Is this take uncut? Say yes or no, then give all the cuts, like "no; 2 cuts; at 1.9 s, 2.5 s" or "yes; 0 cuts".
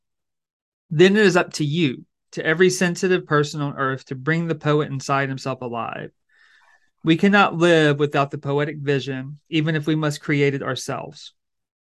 yes; 0 cuts